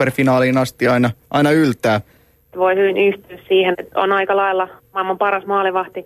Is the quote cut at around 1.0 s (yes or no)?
no